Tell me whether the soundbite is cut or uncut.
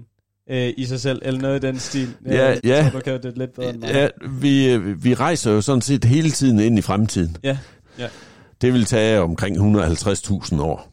cut